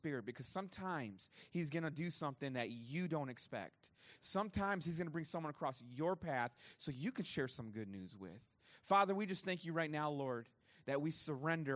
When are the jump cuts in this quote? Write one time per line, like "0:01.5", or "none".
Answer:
none